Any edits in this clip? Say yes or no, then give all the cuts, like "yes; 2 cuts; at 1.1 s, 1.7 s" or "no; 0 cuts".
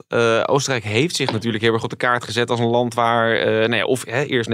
no; 0 cuts